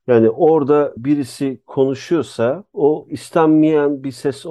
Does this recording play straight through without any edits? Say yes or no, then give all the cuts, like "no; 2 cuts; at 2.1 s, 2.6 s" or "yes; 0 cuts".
yes; 0 cuts